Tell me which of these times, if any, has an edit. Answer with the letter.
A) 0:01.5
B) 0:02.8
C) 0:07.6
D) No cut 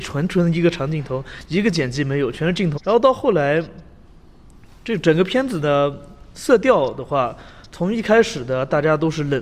B